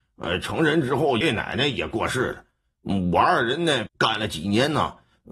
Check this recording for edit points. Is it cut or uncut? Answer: cut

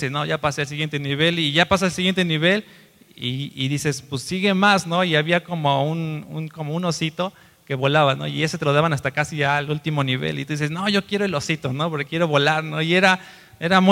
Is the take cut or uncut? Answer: uncut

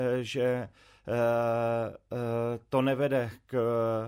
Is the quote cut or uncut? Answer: uncut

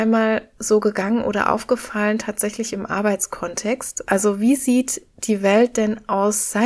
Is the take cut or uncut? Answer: cut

